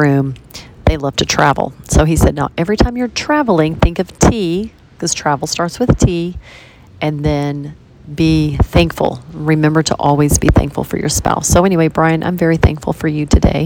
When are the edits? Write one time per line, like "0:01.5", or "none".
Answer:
none